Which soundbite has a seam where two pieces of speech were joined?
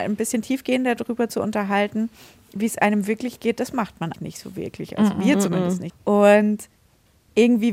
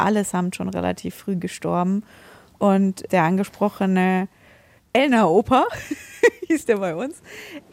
first; 2 cuts; at 4.1 s, 5.9 s

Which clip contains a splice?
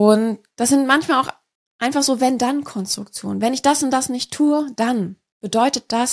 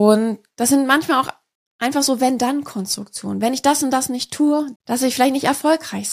second; 1 cut; at 4.8 s

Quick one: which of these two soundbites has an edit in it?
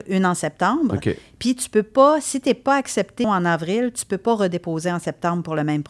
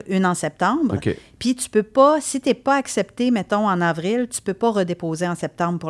first; 1 cut; at 3.2 s

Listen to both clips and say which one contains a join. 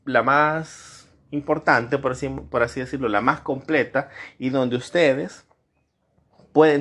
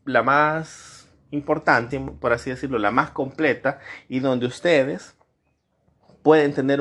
second; 1 cut; at 1.9 s

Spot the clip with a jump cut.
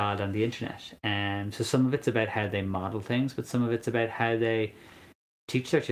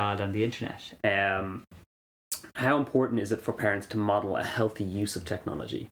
second; 1 cut; at 1.0 s

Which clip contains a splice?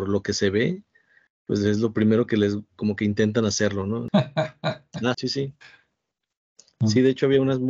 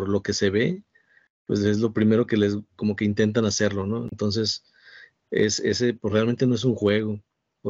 first; 2 cuts; at 4.1 s, 5.1 s

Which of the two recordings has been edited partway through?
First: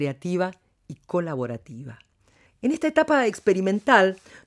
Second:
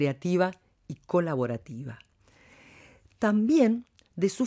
first; 1 cut; at 2.5 s

